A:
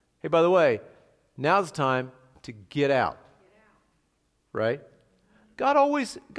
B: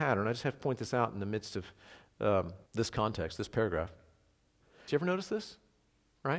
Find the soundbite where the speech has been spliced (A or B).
B